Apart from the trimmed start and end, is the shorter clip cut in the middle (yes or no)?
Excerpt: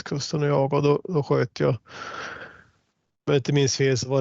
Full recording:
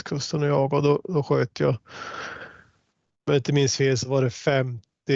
no